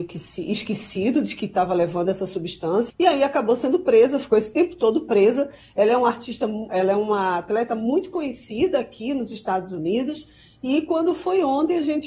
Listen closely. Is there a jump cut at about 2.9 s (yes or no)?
yes